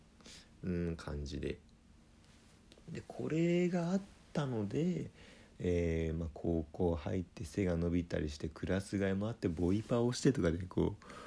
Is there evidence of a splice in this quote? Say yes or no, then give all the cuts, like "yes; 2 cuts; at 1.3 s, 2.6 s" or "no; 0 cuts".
no; 0 cuts